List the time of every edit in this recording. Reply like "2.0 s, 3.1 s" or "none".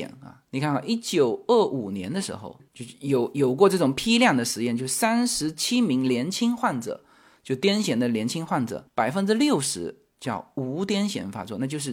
8.9 s